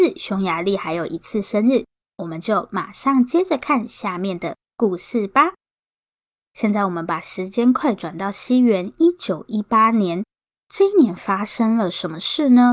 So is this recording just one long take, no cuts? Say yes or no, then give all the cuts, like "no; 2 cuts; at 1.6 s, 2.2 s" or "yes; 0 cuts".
no; 1 cut; at 6.4 s